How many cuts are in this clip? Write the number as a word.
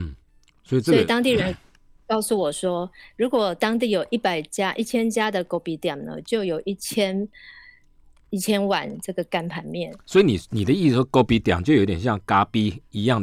zero